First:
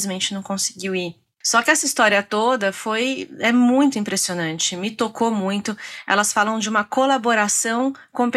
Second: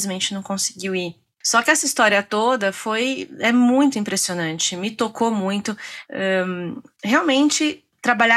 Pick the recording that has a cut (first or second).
second